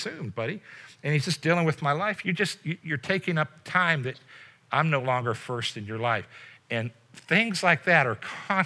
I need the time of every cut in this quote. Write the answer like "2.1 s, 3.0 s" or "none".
2.2 s